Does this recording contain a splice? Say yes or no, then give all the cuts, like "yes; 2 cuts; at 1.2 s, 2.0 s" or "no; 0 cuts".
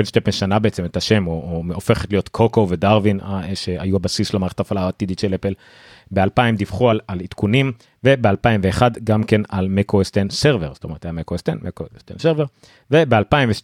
no; 0 cuts